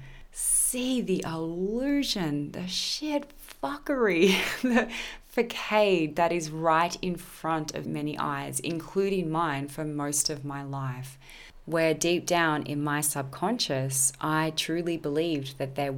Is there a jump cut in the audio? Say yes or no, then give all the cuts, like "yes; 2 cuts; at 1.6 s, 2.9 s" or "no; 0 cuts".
yes; 1 cut; at 7.8 s